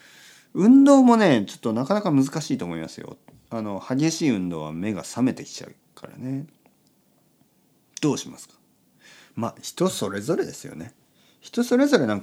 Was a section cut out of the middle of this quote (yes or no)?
no